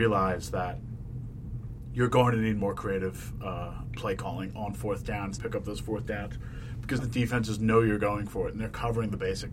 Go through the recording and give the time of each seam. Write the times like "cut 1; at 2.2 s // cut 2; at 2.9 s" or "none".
cut 1; at 5.4 s // cut 2; at 7.0 s